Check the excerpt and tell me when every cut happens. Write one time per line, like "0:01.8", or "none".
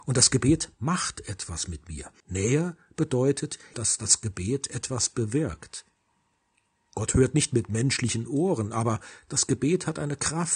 0:02.2
0:03.7